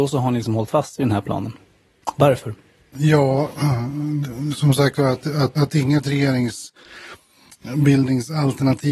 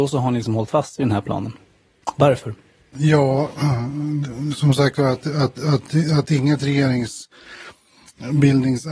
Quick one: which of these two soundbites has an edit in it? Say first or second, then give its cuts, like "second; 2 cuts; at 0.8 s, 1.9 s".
first; 1 cut; at 5.6 s